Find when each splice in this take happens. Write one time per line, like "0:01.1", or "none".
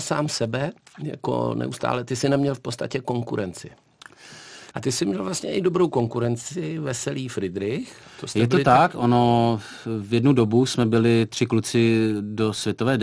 0:04.7